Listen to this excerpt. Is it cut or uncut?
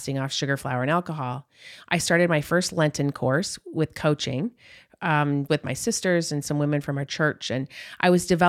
cut